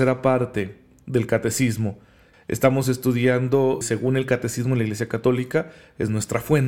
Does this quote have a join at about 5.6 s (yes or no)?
no